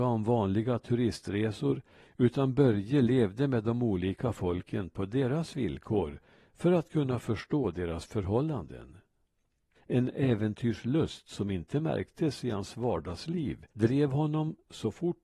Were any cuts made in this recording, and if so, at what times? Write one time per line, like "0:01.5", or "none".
0:09.7
0:13.7